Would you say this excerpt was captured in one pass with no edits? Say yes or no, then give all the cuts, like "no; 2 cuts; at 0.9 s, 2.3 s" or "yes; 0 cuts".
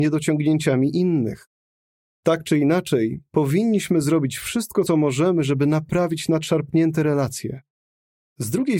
yes; 0 cuts